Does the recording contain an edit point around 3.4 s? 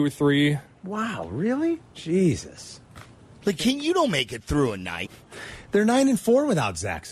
no; 2 cuts; at 1.9 s, 5.0 s

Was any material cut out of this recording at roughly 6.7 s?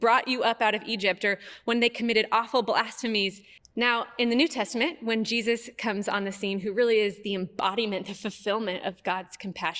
no; 1 cut; at 3.6 s

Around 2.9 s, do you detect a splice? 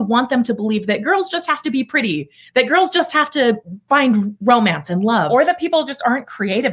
no; 0 cuts

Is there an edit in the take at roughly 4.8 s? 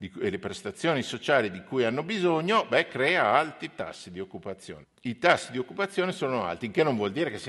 yes; 1 cut; at 4.8 s

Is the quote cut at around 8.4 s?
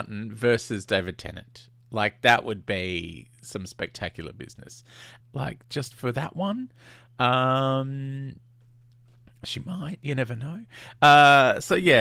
no; 1 cut; at 5.2 s

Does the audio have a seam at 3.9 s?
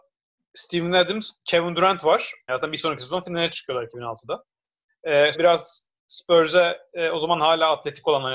no; 2 cuts; at 2.5 s, 5.3 s

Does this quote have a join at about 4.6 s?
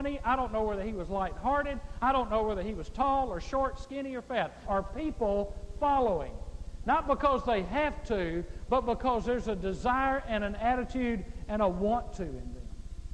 yes; 1 cut; at 4.6 s

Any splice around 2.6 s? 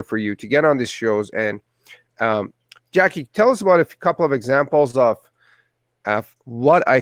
no; 0 cuts

